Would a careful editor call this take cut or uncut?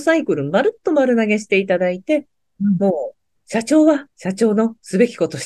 cut